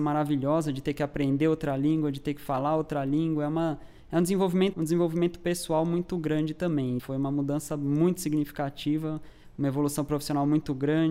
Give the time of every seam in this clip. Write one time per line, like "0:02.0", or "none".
0:04.7
0:07.0